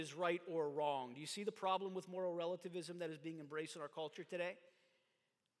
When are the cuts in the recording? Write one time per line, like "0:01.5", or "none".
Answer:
none